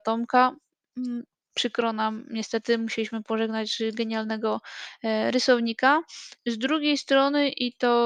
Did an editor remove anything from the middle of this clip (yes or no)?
no